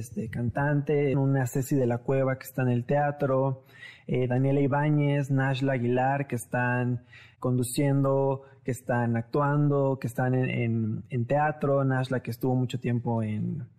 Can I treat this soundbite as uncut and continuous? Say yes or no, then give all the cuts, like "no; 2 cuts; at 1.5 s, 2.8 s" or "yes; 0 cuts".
no; 1 cut; at 1.1 s